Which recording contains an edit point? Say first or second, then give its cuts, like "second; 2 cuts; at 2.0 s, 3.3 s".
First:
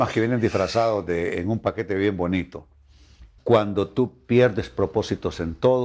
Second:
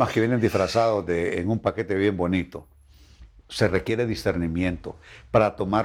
first; 1 cut; at 3.4 s